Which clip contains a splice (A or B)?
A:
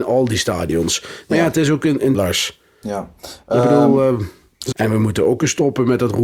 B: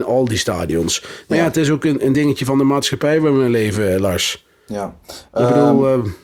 A